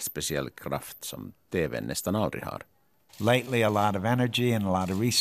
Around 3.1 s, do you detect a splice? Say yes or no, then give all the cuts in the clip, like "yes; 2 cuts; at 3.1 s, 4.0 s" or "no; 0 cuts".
yes; 1 cut; at 3.1 s